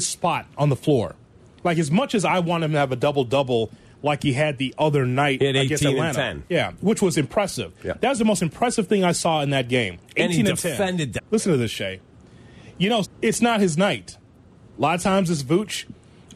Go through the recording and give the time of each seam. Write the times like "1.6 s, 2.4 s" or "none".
11.2 s, 13.0 s, 14.7 s